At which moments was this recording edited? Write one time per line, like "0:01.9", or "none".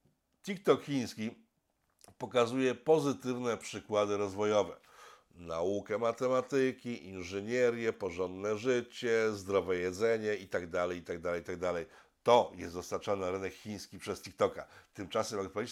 none